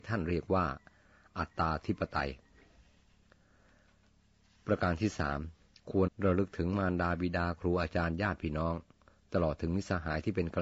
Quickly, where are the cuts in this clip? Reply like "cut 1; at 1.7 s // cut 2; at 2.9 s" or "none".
cut 1; at 6.1 s